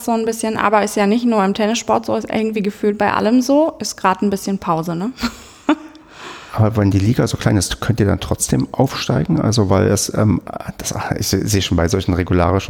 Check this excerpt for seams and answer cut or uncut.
uncut